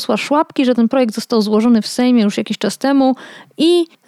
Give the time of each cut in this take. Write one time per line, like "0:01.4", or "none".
none

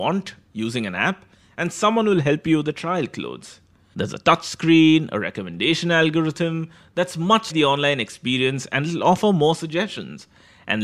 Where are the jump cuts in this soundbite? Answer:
0:03.9
0:07.5

